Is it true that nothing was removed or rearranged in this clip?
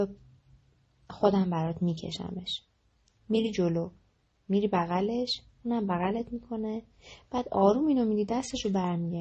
yes; 0 cuts

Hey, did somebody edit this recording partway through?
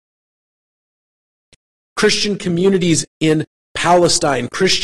yes; 1 cut; at 1.8 s

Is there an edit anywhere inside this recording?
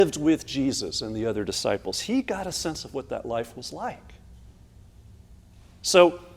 no; 0 cuts

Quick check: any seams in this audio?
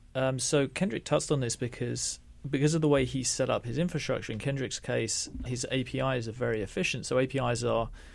yes; 1 cut; at 5.5 s

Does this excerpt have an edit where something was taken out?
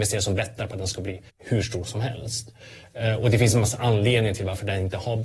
yes; 1 cut; at 1.3 s

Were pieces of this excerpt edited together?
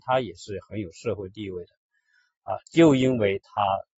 no; 0 cuts

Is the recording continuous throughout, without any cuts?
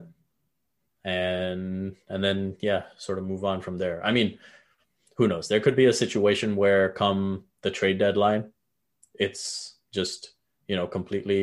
yes; 0 cuts

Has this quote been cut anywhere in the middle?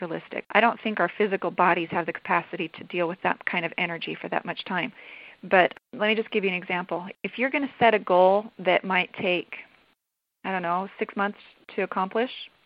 no; 0 cuts

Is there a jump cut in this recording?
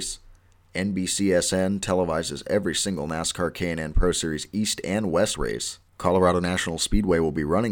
yes; 1 cut; at 5.9 s

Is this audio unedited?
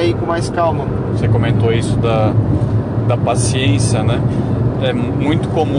no; 1 cut; at 1.1 s

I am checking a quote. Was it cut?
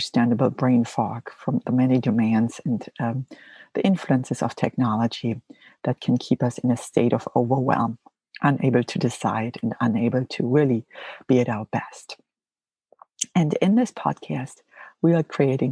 no; 0 cuts

